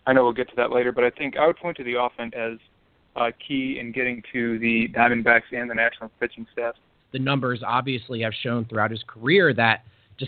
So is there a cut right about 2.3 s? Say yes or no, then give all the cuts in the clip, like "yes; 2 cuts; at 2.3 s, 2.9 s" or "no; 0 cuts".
yes; 2 cuts; at 2.3 s, 7.0 s